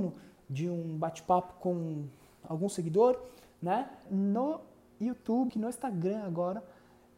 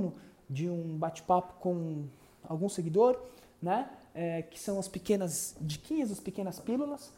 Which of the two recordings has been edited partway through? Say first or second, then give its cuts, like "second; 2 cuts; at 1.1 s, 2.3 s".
first; 2 cuts; at 4.1 s, 5.5 s